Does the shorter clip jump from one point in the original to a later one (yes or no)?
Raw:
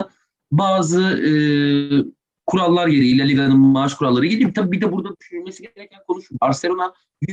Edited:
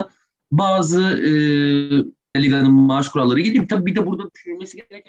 yes